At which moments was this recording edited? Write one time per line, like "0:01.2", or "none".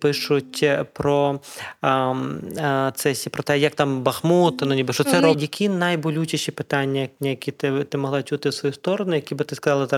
0:05.3